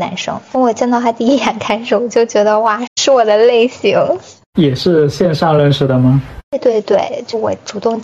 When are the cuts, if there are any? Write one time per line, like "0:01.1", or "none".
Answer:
0:02.9